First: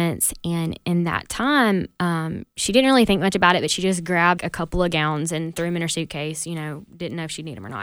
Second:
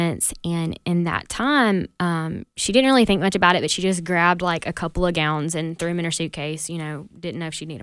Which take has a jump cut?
first; 1 cut; at 4.4 s

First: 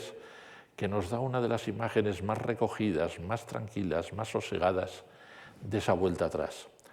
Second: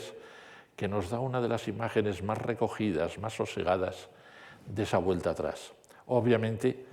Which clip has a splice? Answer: second; 1 cut; at 3.2 s

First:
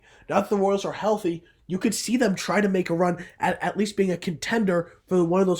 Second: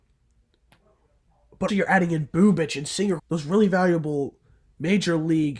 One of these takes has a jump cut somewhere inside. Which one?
second; 2 cuts; at 1.7 s, 3.2 s

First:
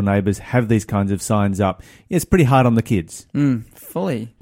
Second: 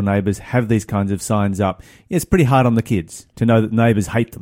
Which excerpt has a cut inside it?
second; 1 cut; at 3.3 s

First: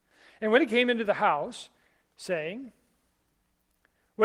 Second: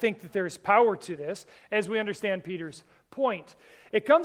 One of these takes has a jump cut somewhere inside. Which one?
first; 1 cut; at 2.0 s

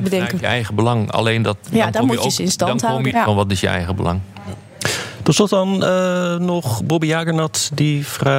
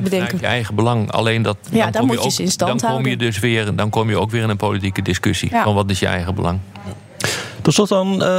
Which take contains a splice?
first; 1 cut; at 3.1 s

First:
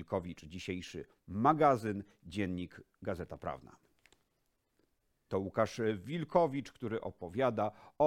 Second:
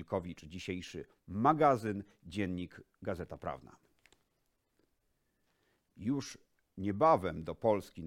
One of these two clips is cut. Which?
first; 1 cut; at 5.3 s

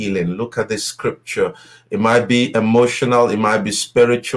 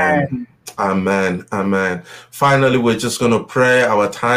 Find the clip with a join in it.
first; 1 cut; at 1.8 s

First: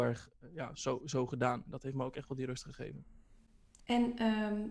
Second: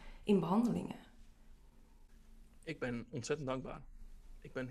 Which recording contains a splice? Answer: first; 1 cut; at 3.8 s

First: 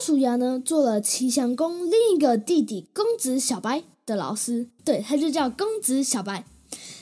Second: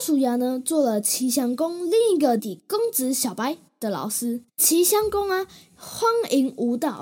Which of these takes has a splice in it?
second; 2 cuts; at 2.4 s, 4.5 s

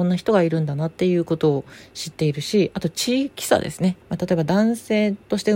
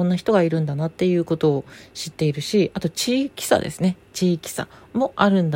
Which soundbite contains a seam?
first; 1 cut; at 4.0 s

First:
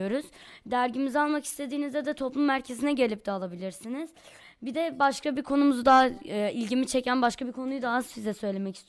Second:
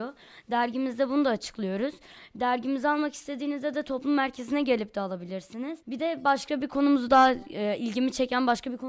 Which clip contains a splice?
second; 1 cut; at 5.8 s

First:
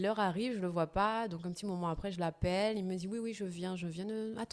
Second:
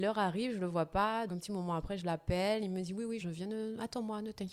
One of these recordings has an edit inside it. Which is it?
second; 2 cuts; at 1.3 s, 3.2 s

